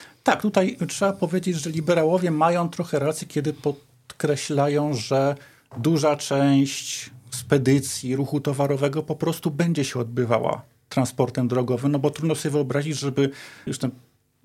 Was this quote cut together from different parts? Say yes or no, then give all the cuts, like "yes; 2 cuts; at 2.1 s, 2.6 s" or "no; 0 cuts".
no; 0 cuts